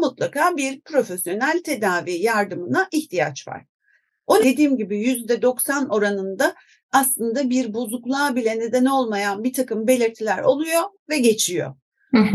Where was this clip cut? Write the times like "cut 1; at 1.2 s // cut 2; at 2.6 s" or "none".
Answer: cut 1; at 4.4 s